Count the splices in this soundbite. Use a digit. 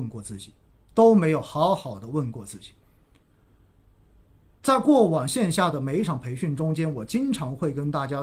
0